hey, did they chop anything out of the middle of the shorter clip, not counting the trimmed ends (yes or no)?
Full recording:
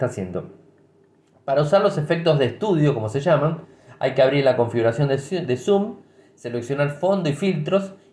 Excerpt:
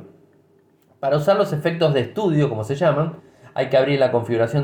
no